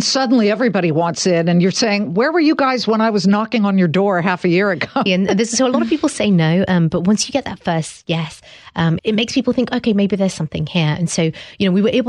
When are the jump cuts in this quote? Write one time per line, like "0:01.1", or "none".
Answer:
0:05.1
0:09.0